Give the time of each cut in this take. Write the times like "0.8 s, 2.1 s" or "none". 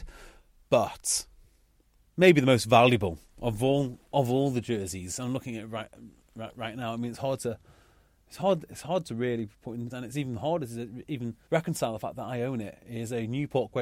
9.9 s, 11.4 s